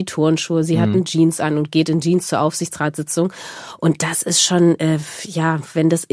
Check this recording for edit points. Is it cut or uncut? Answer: uncut